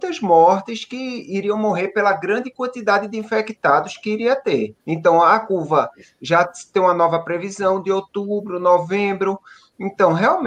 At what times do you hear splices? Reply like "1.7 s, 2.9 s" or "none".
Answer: 4.8 s